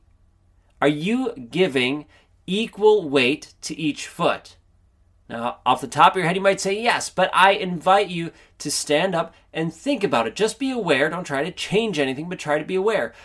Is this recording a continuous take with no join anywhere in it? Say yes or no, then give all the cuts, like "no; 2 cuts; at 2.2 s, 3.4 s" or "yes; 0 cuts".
yes; 0 cuts